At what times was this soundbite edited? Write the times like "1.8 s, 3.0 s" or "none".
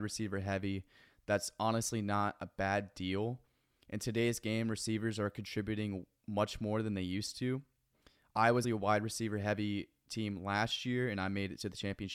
8.6 s